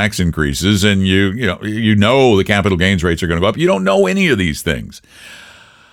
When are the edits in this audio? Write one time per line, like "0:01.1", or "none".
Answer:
none